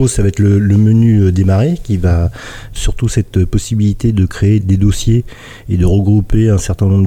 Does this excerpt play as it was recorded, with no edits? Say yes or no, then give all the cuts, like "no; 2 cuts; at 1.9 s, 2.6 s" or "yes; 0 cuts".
no; 2 cuts; at 2.8 s, 4.6 s